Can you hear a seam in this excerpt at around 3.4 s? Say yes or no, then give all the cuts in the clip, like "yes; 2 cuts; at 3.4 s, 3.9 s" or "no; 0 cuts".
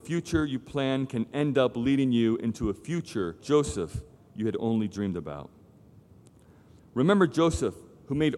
yes; 1 cut; at 3.4 s